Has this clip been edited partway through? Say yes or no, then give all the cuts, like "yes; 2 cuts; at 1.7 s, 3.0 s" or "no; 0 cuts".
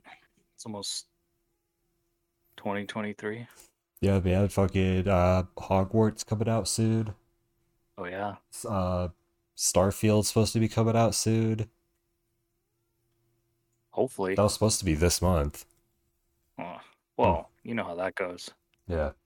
no; 0 cuts